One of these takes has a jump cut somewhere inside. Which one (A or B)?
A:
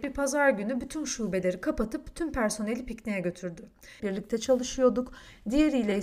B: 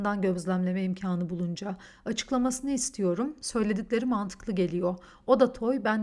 A